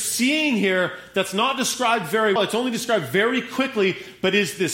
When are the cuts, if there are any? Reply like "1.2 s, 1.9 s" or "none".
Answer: 2.4 s